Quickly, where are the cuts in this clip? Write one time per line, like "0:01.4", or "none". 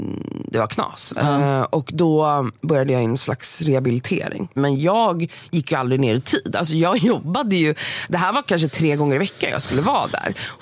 0:04.6